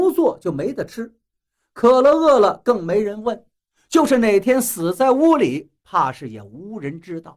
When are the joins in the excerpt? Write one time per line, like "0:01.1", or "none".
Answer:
none